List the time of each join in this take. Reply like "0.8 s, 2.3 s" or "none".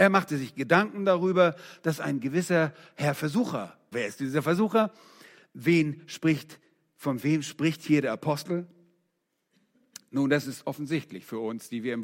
3.9 s